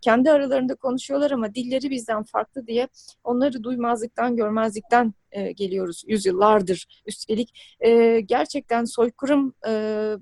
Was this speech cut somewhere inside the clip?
no; 0 cuts

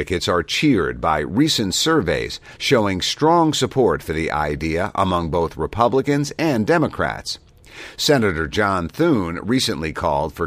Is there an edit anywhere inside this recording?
yes; 1 cut; at 2.6 s

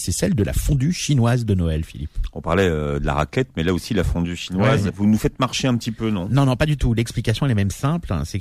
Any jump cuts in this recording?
yes; 1 cut; at 4.9 s

